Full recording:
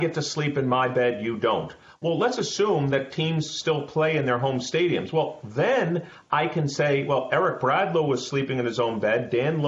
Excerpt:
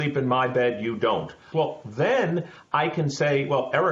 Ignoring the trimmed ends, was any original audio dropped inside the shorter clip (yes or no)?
yes